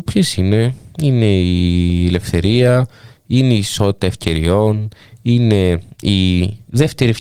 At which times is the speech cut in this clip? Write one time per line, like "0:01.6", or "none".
none